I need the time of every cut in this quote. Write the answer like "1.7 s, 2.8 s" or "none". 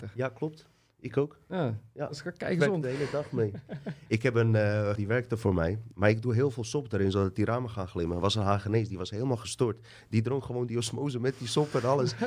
5.0 s